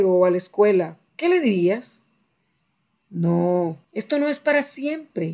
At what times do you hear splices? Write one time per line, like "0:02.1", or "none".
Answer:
0:01.1
0:03.8

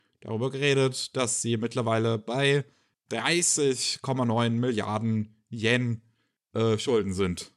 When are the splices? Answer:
none

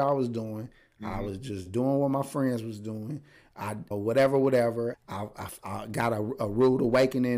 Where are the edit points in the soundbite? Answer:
0:03.9
0:04.9

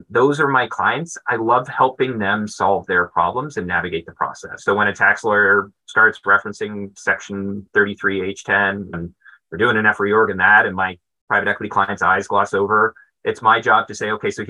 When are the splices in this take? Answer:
0:04.6
0:08.9

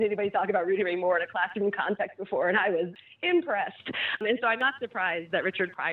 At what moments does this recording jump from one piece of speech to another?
none

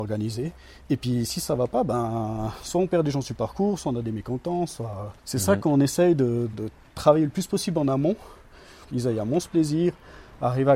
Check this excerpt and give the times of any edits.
0:05.2
0:06.5
0:08.9

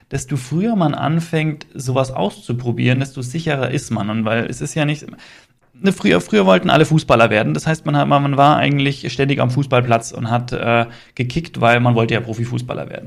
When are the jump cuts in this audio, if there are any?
none

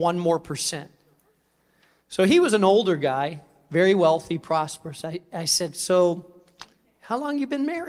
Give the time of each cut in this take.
none

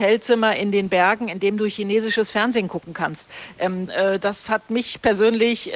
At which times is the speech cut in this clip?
0:03.9

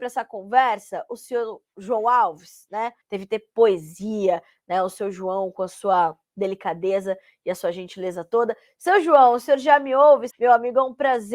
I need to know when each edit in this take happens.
0:03.0
0:10.3

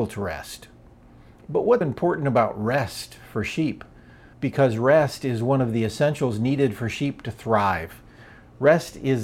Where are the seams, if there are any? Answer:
0:01.8
0:04.3

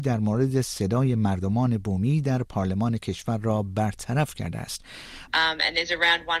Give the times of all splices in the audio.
0:05.3

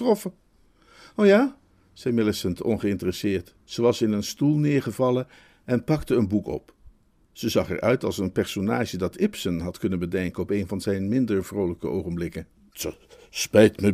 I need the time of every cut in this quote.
0:03.6

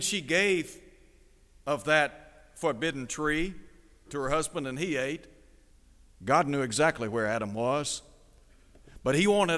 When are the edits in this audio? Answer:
0:04.0
0:06.1

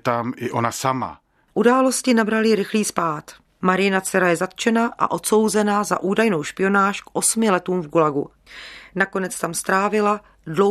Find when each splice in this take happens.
none

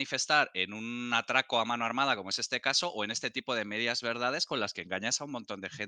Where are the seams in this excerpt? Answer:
none

